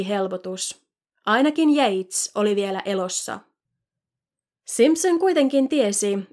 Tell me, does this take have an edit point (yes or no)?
no